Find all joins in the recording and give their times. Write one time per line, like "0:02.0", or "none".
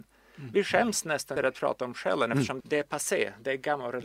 0:01.4
0:02.6

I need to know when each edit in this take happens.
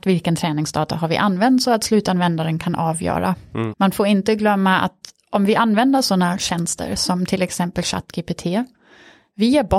0:03.7

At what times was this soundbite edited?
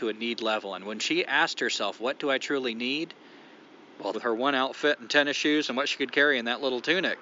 0:04.1

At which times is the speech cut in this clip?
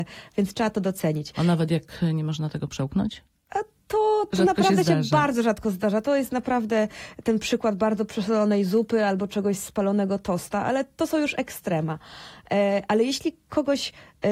none

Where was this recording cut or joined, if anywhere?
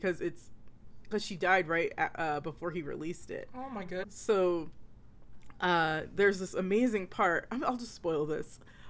0:04.0

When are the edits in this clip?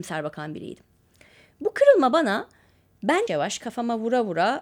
0:03.3

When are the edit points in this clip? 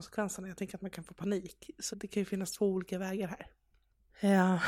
0:01.9

